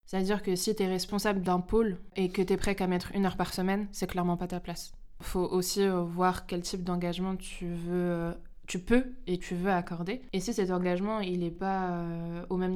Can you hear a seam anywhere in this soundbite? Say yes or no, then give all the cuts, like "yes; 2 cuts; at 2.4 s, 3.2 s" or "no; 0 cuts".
no; 0 cuts